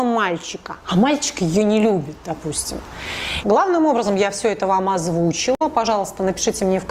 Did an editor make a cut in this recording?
yes; 1 cut; at 3.4 s

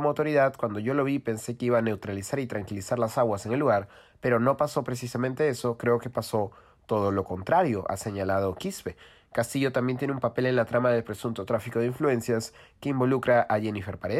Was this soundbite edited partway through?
no; 0 cuts

